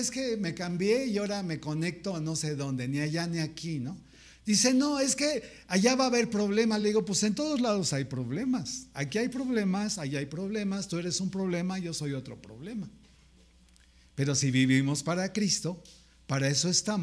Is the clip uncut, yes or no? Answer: yes